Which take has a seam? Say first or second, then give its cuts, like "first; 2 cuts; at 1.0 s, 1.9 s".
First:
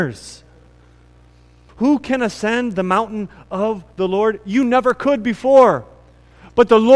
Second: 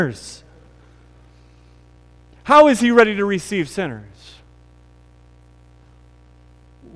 first; 1 cut; at 1.7 s